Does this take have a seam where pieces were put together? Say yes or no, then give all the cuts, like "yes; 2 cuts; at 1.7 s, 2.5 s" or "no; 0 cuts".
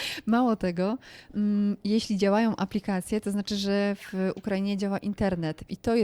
no; 0 cuts